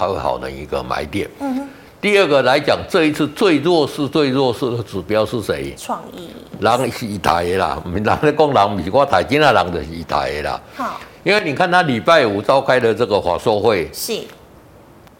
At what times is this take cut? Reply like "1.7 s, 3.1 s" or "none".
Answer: none